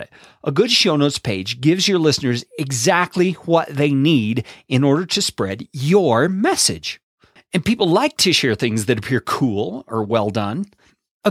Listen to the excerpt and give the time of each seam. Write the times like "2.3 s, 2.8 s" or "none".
7.4 s

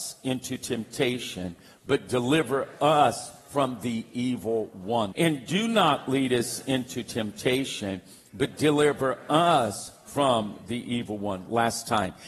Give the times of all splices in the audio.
5.1 s

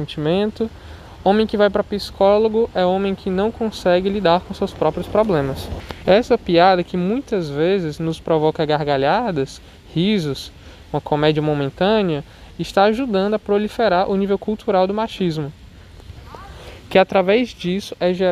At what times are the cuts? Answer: 6.0 s

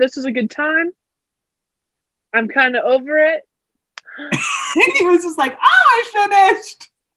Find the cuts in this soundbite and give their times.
3.8 s

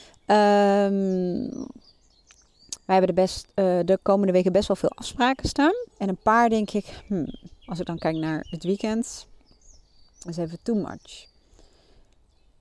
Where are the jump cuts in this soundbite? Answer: 5.9 s

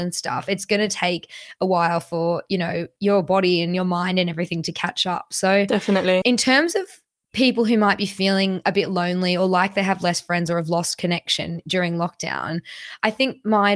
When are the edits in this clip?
6.2 s

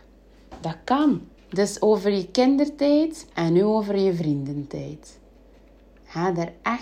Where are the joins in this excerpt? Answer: 1.4 s, 3.3 s

